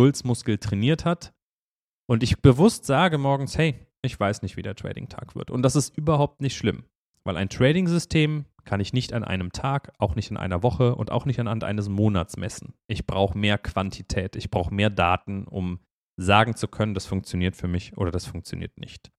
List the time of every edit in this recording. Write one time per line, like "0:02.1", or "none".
none